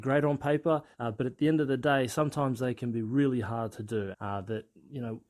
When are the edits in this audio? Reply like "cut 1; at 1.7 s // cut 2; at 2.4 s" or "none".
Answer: cut 1; at 0.9 s // cut 2; at 4.1 s

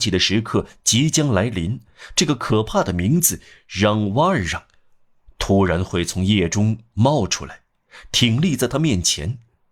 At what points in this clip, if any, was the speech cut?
none

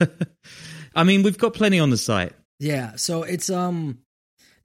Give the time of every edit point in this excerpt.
cut 1; at 2.5 s

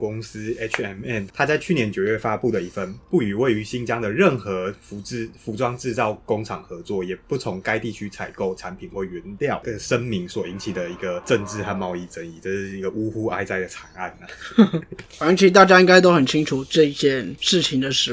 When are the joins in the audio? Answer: none

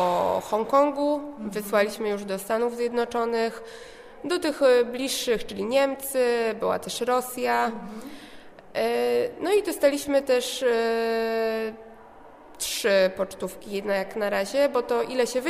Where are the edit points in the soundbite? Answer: none

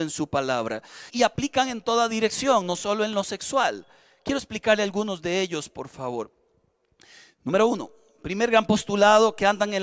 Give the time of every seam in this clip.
cut 1; at 1.1 s

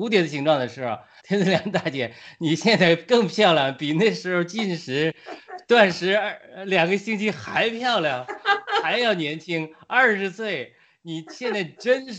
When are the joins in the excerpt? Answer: cut 1; at 1.2 s

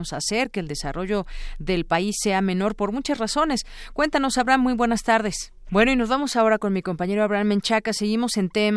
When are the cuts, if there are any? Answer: cut 1; at 5.7 s

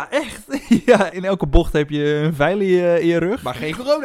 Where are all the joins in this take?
cut 1; at 1.1 s

